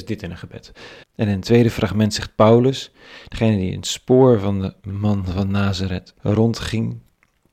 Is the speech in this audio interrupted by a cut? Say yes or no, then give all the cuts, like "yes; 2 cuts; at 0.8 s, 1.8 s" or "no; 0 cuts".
yes; 2 cuts; at 1.0 s, 6.2 s